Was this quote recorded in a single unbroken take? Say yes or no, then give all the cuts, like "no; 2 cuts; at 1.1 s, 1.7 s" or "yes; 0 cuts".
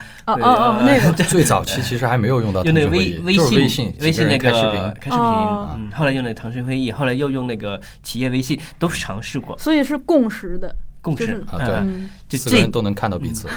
yes; 0 cuts